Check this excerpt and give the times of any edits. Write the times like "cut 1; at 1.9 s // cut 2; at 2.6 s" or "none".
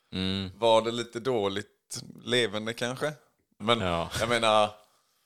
cut 1; at 3.6 s